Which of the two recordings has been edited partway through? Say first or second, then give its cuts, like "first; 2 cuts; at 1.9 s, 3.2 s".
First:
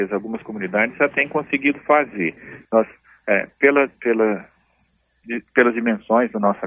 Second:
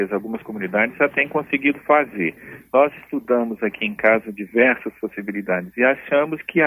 first; 1 cut; at 2.6 s